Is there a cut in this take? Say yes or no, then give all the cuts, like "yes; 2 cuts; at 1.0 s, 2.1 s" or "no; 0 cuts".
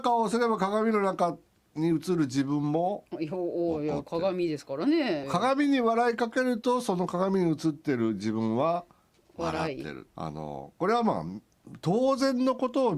yes; 2 cuts; at 5.2 s, 10.1 s